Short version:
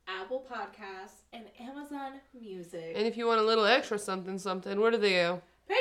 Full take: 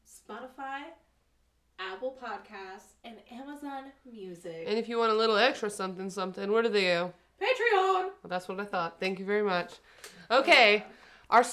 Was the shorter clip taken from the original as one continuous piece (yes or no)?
yes